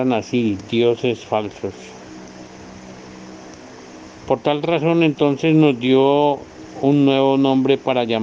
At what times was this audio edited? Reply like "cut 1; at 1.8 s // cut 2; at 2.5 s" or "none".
none